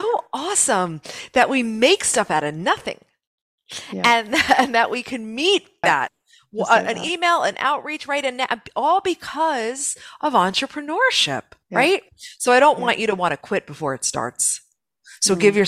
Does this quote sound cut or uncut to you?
cut